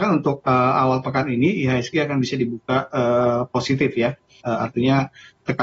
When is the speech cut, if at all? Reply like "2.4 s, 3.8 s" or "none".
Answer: 4.4 s